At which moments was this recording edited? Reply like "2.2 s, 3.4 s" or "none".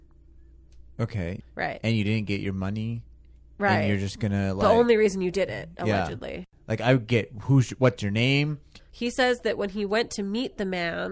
1.4 s, 8.8 s